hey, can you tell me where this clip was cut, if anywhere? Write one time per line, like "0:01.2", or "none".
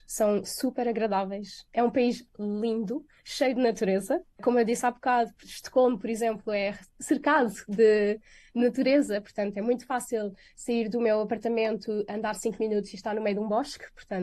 none